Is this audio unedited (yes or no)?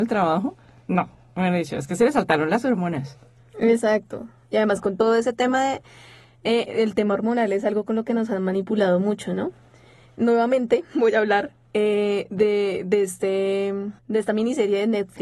no